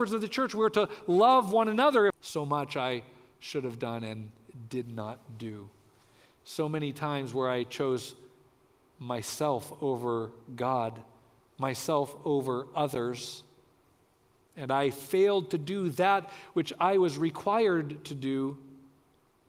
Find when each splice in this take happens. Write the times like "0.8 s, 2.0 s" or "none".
2.1 s